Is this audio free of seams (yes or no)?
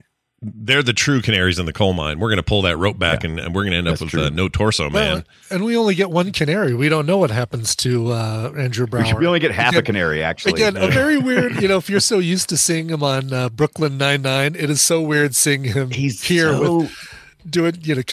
yes